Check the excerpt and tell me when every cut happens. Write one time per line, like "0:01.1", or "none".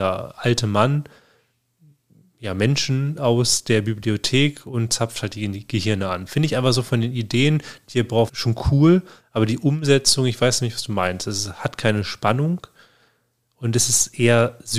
0:08.3